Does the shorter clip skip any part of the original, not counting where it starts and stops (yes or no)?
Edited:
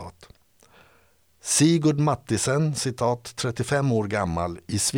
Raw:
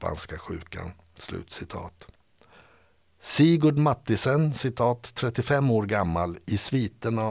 no